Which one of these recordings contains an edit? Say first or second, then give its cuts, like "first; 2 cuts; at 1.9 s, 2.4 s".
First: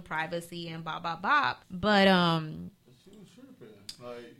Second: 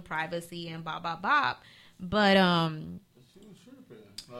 first; 1 cut; at 1.6 s